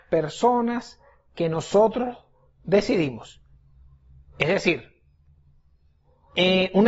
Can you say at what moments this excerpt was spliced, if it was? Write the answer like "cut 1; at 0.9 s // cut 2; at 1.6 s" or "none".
none